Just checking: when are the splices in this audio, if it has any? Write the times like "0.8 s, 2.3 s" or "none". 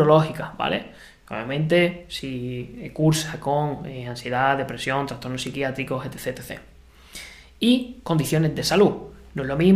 none